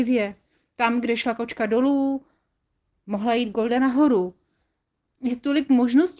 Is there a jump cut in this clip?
no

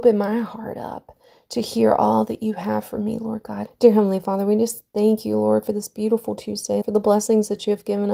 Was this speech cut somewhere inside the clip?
yes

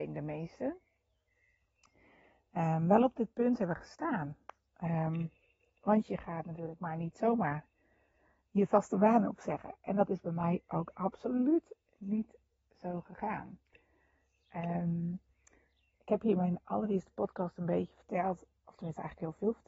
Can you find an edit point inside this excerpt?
no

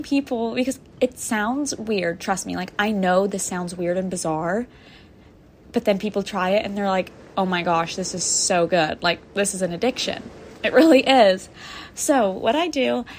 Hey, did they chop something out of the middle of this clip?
no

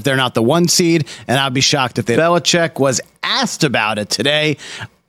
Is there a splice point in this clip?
yes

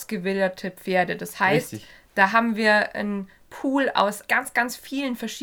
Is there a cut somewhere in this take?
yes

